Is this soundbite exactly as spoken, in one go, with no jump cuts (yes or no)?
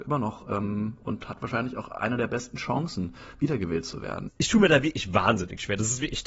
yes